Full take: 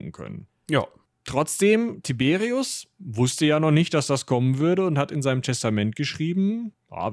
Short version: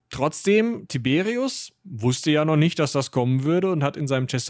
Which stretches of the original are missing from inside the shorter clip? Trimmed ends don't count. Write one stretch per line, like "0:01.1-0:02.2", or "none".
none